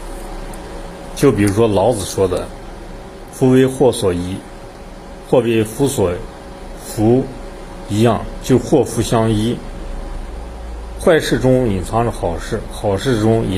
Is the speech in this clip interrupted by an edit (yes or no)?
no